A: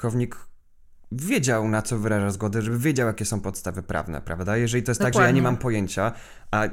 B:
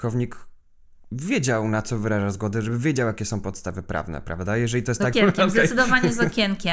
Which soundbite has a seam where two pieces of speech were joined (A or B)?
B